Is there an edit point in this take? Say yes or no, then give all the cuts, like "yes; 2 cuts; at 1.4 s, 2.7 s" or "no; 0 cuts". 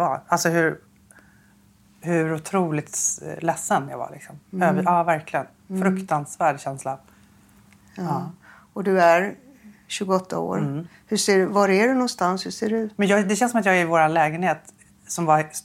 no; 0 cuts